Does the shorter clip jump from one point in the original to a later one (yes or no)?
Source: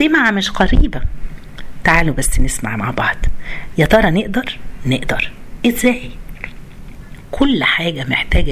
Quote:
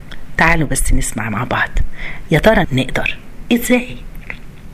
yes